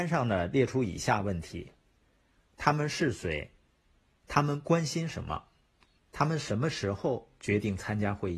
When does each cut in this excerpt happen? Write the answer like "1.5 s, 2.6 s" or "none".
6.0 s